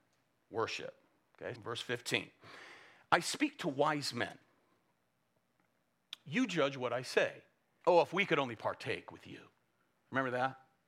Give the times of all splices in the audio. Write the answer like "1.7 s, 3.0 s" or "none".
1.5 s, 7.8 s